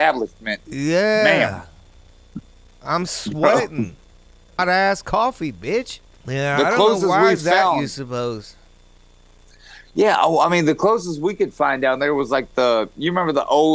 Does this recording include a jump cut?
yes; 2 cuts; at 4.6 s, 6.1 s

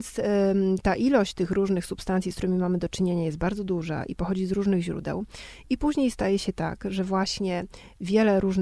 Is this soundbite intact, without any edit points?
yes; 0 cuts

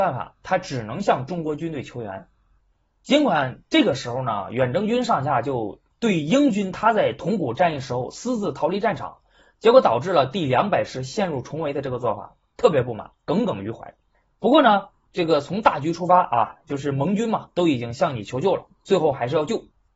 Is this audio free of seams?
yes; 0 cuts

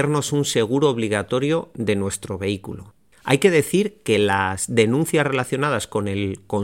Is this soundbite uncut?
no; 1 cut; at 3.1 s

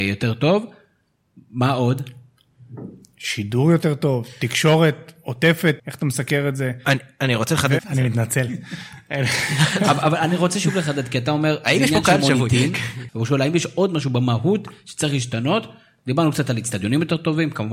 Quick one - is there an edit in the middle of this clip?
yes; 3 cuts; at 5.8 s, 7.8 s, 13.1 s

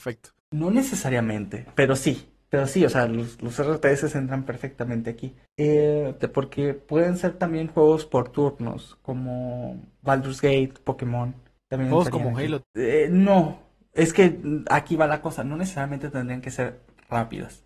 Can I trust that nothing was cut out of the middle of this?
no; 2 cuts; at 6.2 s, 12.6 s

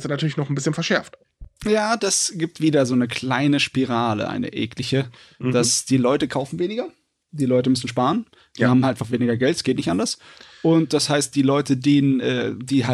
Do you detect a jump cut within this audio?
no; 0 cuts

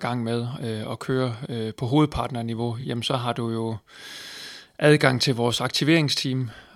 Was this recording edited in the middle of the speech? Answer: no; 0 cuts

